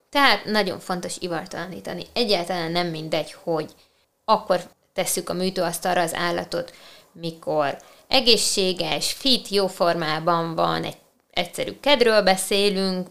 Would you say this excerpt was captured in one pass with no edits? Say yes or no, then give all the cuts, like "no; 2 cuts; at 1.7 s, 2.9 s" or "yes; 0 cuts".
yes; 0 cuts